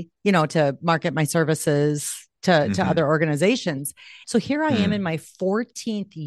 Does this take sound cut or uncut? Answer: cut